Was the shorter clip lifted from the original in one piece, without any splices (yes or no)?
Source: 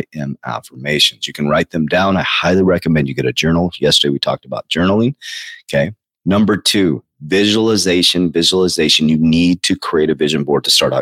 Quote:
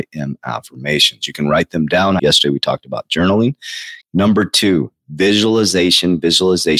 no